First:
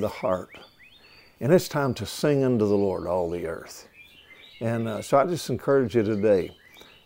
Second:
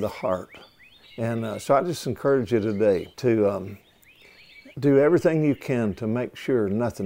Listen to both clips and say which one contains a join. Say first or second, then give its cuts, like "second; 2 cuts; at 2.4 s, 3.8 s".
second; 3 cuts; at 1.0 s, 3.1 s, 4.7 s